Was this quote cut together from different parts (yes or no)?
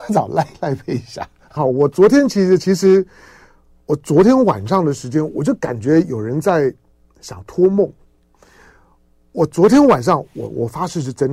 yes